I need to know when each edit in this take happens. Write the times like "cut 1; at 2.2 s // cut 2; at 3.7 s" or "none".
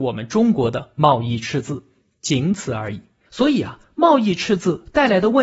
cut 1; at 3.3 s

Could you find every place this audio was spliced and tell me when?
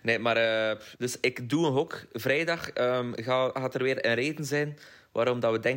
cut 1; at 0.9 s

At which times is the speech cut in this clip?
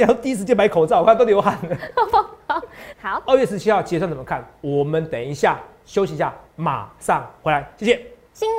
cut 1; at 2.9 s

